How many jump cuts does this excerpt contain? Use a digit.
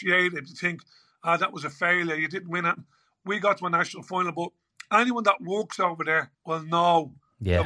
1